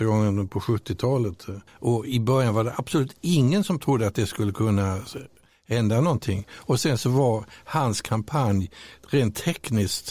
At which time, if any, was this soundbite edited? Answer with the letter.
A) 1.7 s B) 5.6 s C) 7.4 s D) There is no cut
A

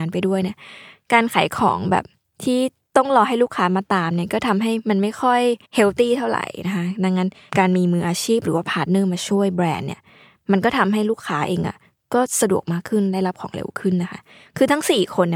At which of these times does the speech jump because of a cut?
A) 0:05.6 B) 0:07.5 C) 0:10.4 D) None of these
A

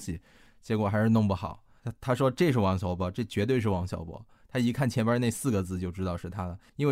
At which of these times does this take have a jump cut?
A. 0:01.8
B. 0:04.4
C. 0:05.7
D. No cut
A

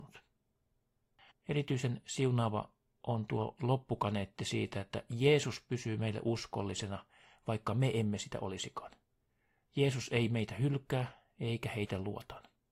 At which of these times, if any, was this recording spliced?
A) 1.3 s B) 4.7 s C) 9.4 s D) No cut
A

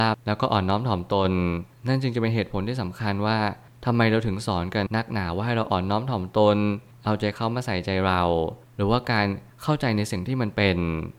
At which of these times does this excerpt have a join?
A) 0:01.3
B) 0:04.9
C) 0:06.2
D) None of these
B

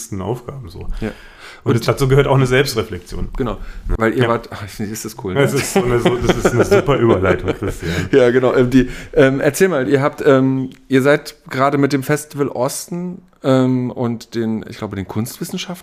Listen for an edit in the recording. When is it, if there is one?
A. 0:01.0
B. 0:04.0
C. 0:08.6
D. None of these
B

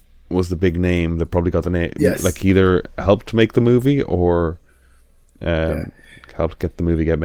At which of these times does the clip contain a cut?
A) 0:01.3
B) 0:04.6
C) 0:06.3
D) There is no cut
D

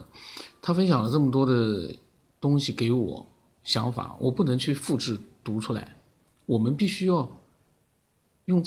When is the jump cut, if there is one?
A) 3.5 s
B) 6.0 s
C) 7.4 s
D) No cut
A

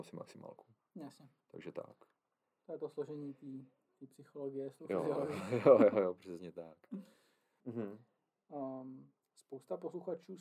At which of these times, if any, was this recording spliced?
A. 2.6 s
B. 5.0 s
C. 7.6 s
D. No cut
C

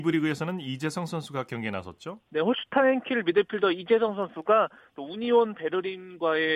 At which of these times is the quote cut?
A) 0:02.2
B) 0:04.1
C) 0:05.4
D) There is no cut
A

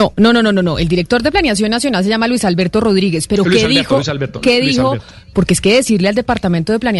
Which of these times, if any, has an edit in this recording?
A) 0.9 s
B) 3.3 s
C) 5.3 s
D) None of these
C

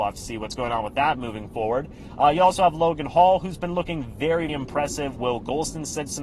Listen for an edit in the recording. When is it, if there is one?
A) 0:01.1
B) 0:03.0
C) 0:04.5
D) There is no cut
C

